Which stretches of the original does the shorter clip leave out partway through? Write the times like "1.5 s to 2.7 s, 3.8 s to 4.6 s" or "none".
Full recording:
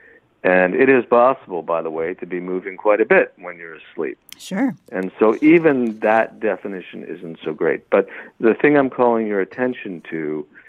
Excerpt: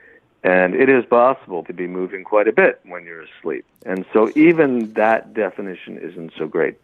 1.6 s to 2.2 s, 4.3 s to 4.8 s